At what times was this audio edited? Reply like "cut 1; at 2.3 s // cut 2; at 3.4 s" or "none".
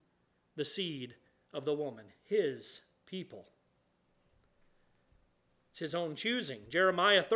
none